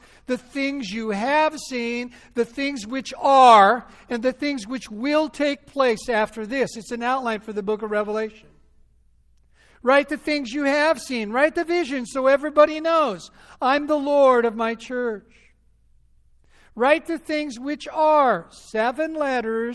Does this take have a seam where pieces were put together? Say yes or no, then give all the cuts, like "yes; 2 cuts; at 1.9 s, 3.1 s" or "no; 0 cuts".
no; 0 cuts